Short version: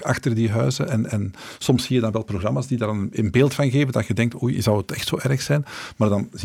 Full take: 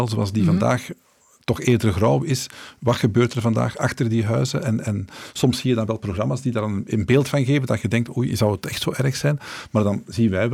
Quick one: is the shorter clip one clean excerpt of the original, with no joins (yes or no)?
yes